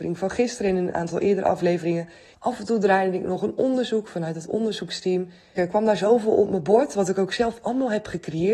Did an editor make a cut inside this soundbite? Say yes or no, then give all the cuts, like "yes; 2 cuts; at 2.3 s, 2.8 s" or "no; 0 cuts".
yes; 2 cuts; at 2.3 s, 5.6 s